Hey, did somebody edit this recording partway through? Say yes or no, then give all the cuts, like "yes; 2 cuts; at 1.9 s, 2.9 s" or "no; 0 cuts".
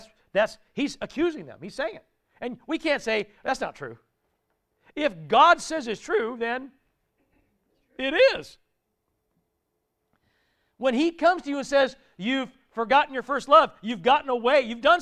no; 0 cuts